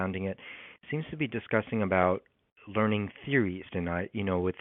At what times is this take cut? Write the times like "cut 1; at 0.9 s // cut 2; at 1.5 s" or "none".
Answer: cut 1; at 3.7 s